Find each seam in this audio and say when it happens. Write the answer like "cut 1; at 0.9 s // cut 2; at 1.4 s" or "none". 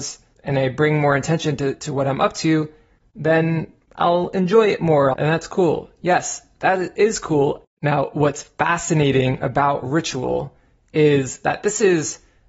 cut 1; at 5.1 s // cut 2; at 7.6 s